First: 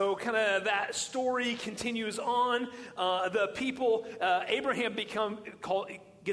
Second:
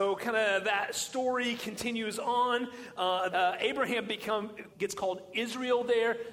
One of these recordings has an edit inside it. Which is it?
second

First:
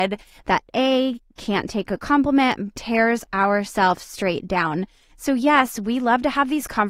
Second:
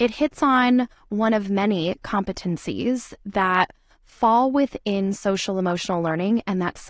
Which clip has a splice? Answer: first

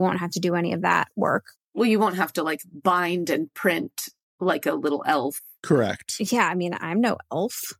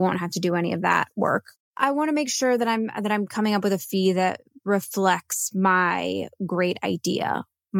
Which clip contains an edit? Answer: second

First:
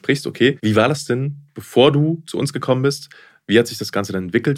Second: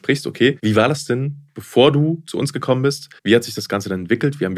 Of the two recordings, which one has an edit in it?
second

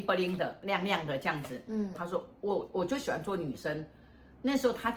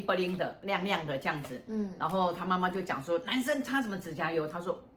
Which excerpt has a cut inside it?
first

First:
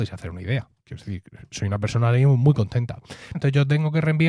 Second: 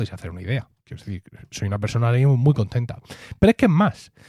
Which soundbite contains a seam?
first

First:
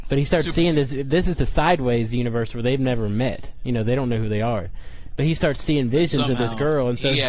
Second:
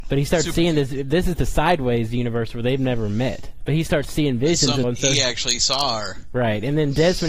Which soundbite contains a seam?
second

